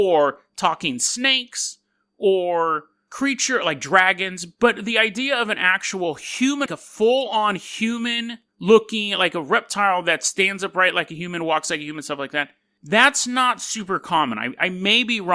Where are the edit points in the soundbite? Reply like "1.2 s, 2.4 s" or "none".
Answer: 6.7 s